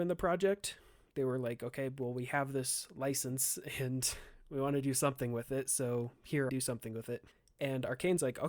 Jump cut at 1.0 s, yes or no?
no